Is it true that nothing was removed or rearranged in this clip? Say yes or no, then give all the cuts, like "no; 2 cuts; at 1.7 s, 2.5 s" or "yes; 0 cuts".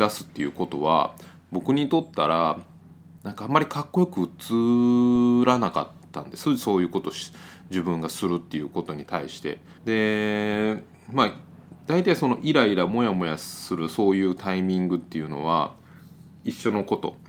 no; 1 cut; at 9.8 s